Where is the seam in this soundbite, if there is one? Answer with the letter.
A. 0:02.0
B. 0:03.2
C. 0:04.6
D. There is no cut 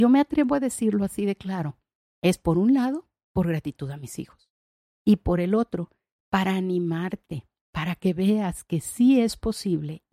D